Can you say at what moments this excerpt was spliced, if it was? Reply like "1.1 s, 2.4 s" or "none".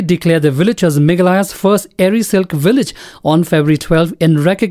none